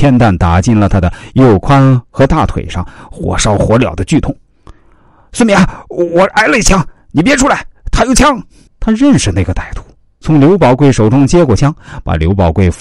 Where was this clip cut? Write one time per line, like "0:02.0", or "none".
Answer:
0:08.7
0:10.2